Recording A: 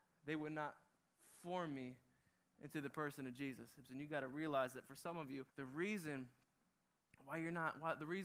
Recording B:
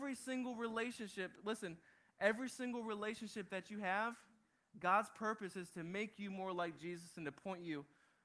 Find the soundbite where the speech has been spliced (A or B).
A